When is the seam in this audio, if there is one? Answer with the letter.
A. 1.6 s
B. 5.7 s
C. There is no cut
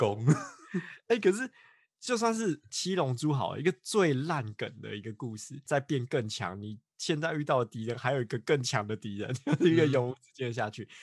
B